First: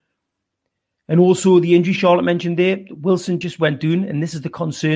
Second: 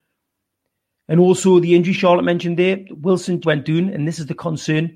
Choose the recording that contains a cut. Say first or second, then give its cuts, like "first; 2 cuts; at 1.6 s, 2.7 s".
second; 1 cut; at 3.4 s